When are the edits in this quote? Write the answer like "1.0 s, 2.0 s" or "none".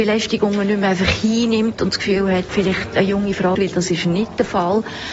2.5 s, 3.5 s